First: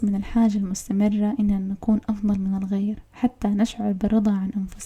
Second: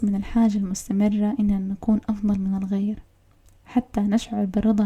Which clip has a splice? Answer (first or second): first